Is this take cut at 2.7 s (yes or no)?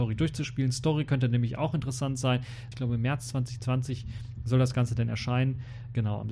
yes